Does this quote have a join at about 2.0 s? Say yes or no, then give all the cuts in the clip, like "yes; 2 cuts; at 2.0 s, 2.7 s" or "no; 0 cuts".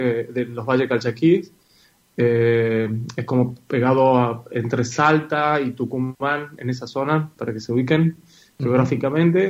no; 0 cuts